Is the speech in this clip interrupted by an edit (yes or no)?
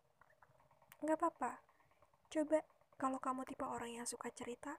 no